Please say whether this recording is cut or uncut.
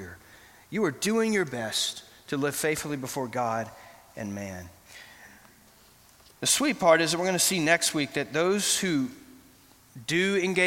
uncut